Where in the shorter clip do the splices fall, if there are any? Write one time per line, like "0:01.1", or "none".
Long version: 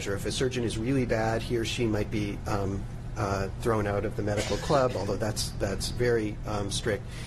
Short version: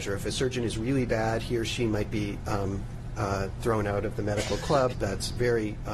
0:04.9